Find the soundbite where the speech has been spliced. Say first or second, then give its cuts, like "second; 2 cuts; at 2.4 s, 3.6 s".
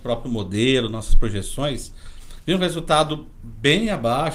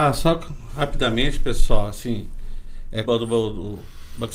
second; 1 cut; at 3.0 s